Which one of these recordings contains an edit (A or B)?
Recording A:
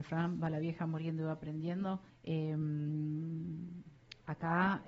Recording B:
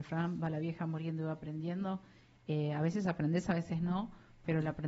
A